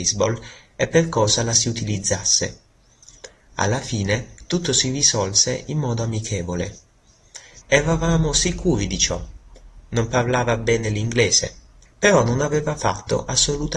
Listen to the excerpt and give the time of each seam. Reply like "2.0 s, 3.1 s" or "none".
7.6 s, 11.8 s